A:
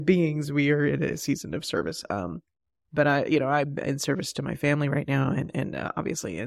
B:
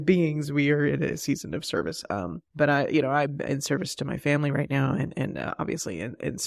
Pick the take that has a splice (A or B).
B